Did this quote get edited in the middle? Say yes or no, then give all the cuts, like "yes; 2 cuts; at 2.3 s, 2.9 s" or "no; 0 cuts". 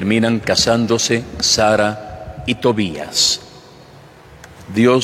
no; 0 cuts